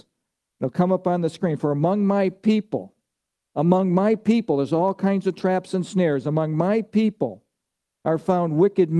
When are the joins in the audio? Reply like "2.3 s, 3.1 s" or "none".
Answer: none

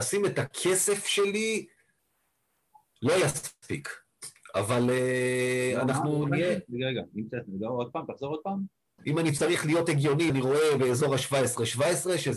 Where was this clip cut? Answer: 9.0 s, 10.3 s

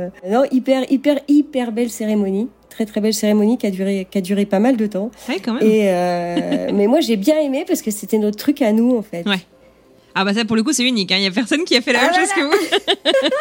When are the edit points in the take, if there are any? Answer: none

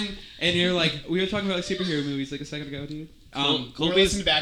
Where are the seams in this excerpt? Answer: none

